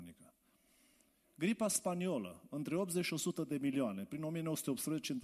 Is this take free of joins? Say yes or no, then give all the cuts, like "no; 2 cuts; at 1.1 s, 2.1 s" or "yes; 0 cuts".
yes; 0 cuts